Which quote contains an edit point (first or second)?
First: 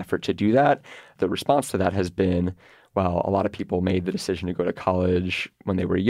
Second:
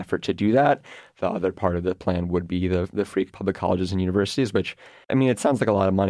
second